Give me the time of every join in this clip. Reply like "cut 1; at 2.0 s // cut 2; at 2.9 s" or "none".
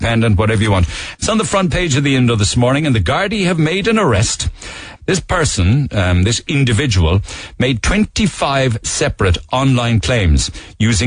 cut 1; at 1.1 s // cut 2; at 5.0 s

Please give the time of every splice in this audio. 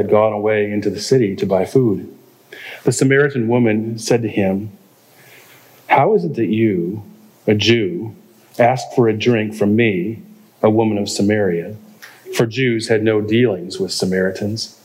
none

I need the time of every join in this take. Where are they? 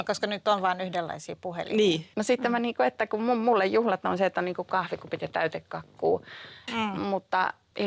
cut 1; at 2.1 s // cut 2; at 6.7 s

